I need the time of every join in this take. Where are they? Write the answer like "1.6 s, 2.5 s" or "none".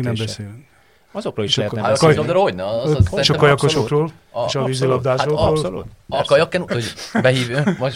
6.7 s